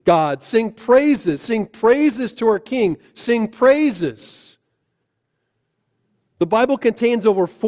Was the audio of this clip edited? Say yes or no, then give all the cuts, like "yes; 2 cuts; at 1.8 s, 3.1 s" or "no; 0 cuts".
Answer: no; 0 cuts